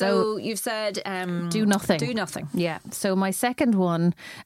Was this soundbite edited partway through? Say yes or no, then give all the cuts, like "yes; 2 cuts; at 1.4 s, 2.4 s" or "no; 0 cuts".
no; 0 cuts